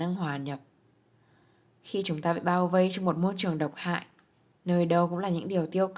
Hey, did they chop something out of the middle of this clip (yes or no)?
no